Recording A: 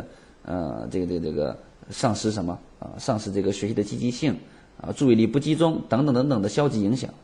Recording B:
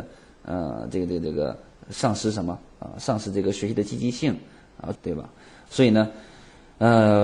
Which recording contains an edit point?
B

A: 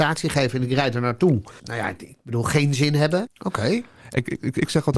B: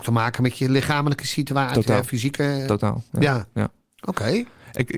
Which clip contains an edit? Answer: A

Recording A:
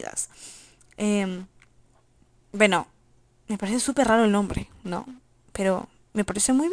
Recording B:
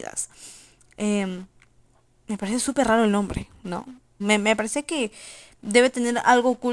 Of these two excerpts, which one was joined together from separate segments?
B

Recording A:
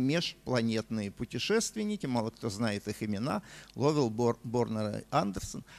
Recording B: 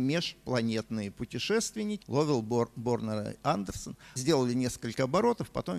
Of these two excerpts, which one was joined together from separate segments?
B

